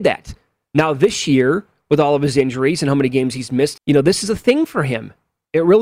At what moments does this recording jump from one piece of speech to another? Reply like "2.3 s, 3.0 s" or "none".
3.8 s